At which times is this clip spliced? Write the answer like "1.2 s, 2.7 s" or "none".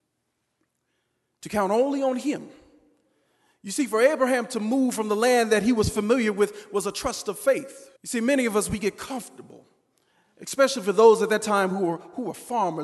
8.0 s